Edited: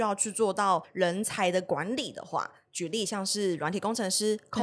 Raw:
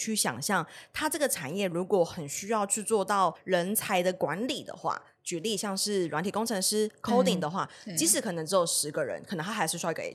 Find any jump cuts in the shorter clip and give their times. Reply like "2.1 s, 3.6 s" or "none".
none